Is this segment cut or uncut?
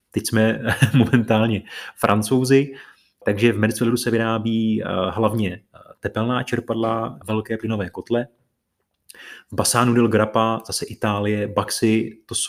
cut